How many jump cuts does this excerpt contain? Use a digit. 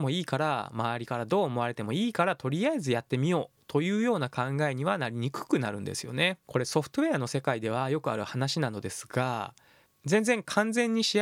1